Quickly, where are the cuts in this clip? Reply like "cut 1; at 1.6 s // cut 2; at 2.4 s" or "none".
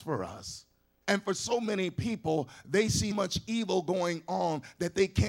cut 1; at 1.0 s // cut 2; at 3.1 s